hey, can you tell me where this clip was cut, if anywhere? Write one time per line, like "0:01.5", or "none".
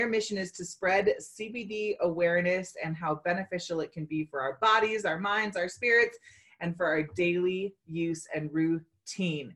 none